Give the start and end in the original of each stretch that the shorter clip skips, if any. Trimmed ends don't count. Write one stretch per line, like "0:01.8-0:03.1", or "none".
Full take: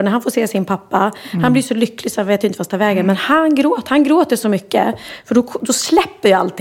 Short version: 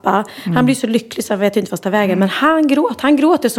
none